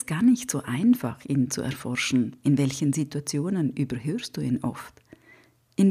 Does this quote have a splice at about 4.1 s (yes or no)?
no